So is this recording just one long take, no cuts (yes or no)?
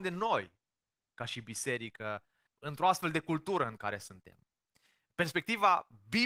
no